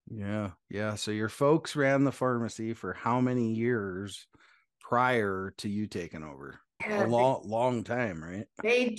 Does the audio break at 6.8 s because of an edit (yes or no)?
yes